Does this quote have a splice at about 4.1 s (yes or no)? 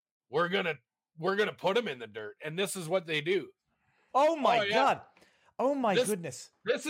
yes